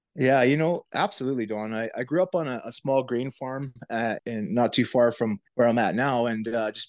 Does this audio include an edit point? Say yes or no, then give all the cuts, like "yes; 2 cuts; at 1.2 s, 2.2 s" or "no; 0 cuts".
yes; 2 cuts; at 4.2 s, 5.5 s